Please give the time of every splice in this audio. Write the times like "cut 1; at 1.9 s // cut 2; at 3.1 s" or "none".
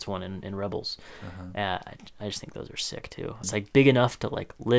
cut 1; at 3.4 s